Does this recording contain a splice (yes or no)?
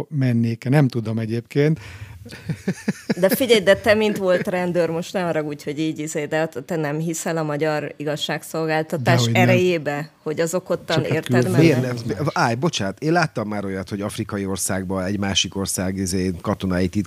no